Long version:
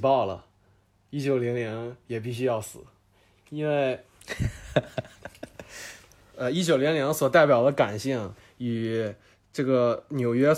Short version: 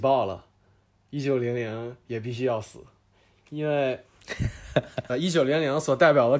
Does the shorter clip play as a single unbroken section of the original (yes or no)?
no